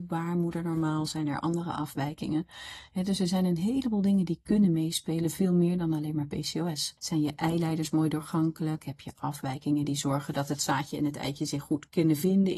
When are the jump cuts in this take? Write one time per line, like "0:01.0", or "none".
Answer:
0:07.0

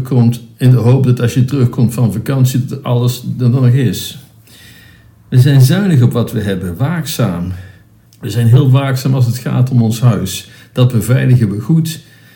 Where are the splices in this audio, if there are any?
0:08.1

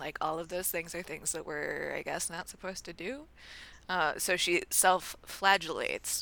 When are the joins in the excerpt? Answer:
none

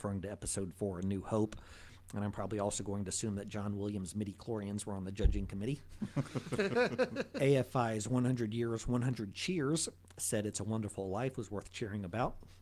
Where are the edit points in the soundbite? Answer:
none

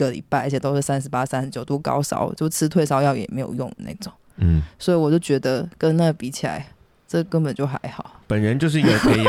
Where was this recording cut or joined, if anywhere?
none

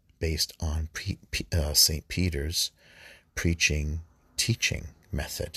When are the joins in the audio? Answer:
none

